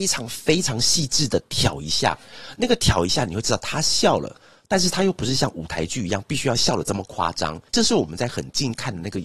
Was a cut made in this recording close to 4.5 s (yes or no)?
no